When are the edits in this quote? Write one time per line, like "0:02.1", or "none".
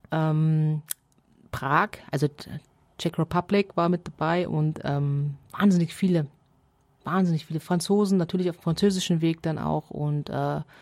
0:05.4